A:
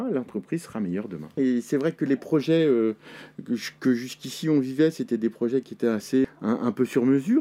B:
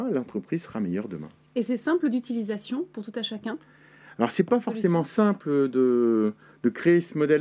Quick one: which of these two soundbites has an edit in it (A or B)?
A